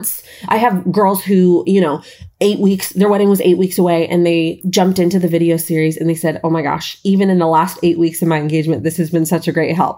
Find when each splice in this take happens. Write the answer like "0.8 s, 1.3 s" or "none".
4.6 s